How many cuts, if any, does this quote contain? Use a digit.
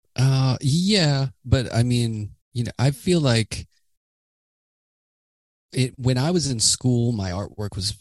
1